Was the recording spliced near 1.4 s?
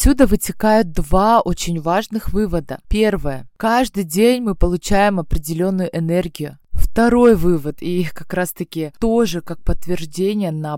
no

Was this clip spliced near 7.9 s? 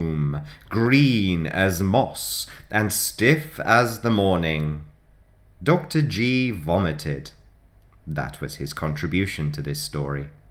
no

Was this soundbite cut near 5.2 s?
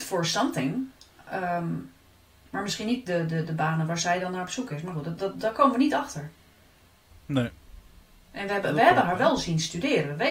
yes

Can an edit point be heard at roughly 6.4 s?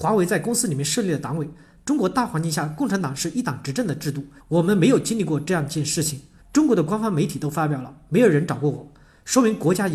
yes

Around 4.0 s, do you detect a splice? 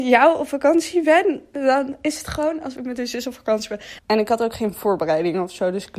yes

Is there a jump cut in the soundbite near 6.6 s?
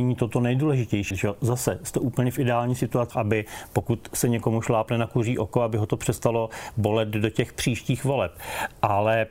no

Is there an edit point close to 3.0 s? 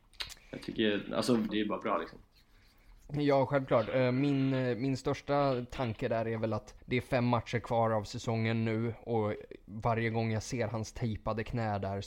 no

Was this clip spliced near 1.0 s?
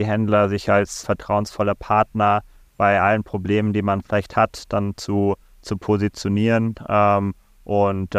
yes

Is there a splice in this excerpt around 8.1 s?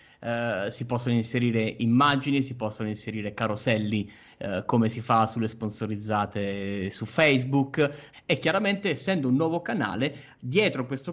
yes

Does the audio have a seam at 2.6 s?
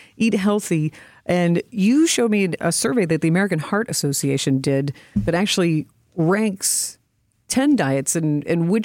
yes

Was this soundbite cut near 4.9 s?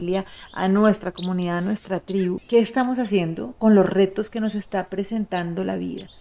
no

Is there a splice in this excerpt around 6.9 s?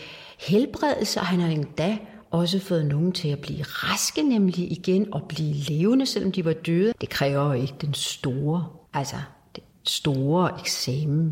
yes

